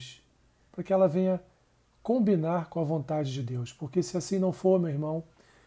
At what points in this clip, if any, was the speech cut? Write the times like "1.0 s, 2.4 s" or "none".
none

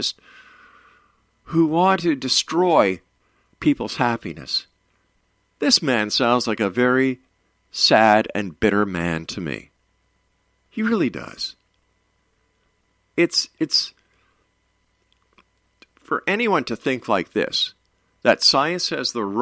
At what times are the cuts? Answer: none

